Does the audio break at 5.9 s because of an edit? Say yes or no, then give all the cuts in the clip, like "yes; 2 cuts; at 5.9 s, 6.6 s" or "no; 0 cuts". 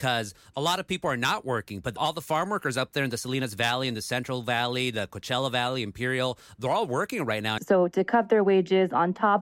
no; 1 cut; at 7.6 s